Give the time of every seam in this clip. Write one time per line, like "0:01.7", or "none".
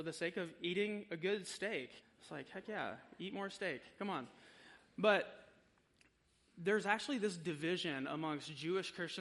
0:02.0